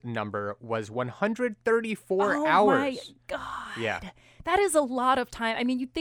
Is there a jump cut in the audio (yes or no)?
no